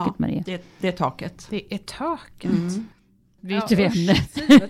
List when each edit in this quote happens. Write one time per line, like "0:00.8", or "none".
none